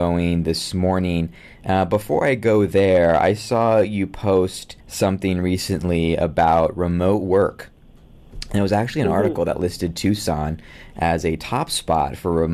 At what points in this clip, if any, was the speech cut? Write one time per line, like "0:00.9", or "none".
0:04.8

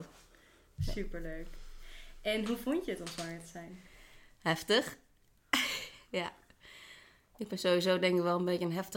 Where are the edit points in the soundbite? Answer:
none

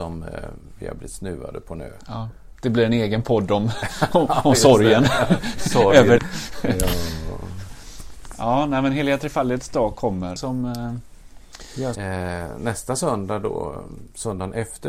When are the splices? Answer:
0:06.2
0:10.4
0:11.9

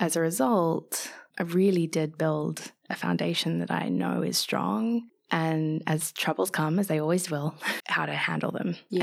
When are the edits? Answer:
0:07.8

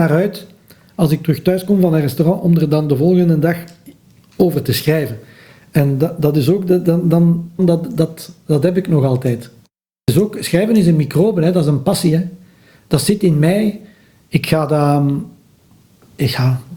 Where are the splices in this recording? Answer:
0:07.6

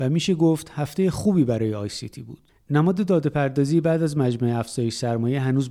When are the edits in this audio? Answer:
none

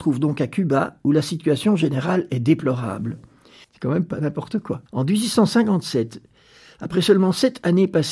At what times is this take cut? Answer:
0:03.6
0:04.9

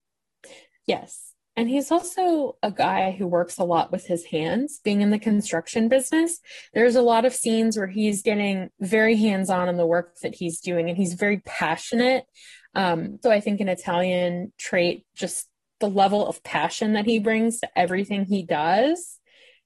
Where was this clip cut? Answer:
0:13.2

